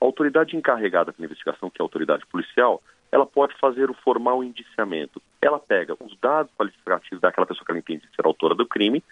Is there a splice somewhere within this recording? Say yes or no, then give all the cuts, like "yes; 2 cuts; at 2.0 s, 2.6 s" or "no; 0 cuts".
no; 0 cuts